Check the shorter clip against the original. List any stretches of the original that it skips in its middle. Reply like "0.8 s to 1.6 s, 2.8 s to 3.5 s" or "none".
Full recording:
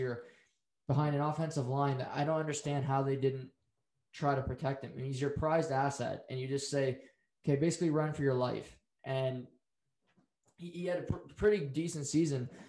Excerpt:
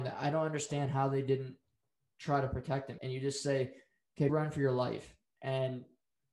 4.9 s to 6.3 s, 7.6 s to 7.9 s

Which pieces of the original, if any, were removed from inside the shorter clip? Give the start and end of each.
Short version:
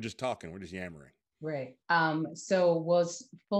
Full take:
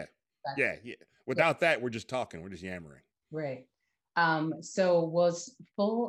3.7 s to 4.1 s

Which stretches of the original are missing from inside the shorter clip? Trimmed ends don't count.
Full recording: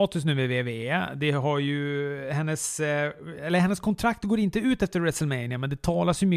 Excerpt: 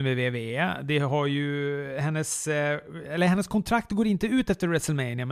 none

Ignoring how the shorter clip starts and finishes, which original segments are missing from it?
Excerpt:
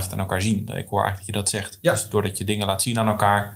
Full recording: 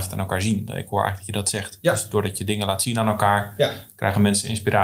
none

